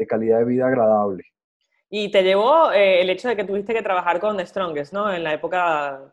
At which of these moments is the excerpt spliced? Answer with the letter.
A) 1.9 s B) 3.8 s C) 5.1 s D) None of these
D